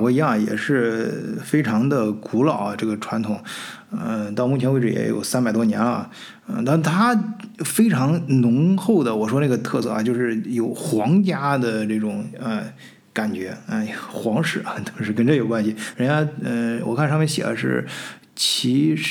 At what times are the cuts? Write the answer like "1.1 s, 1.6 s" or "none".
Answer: 15.9 s